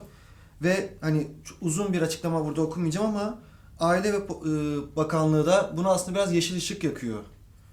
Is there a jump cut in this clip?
no; 0 cuts

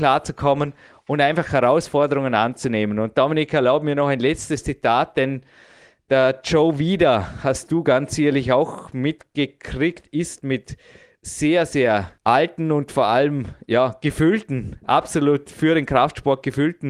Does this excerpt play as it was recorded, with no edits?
yes; 0 cuts

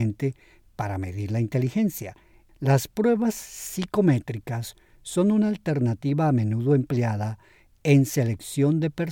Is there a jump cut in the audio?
yes; 1 cut; at 2.5 s

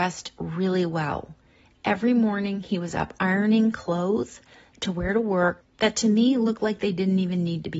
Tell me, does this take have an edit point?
no; 0 cuts

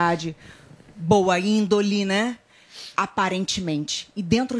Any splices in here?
no; 0 cuts

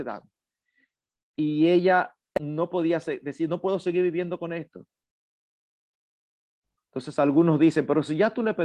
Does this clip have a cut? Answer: no; 0 cuts

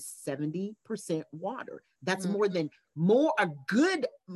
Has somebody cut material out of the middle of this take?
no; 0 cuts

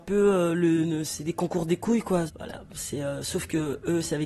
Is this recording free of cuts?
no; 1 cut; at 2.3 s

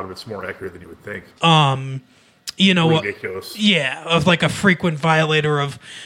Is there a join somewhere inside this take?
yes; 1 cut; at 1.4 s

